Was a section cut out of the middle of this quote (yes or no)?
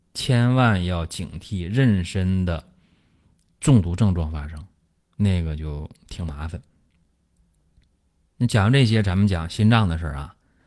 no